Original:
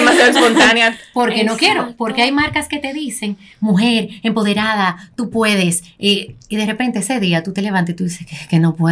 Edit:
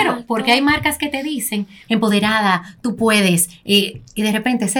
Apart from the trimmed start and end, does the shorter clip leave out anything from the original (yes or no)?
yes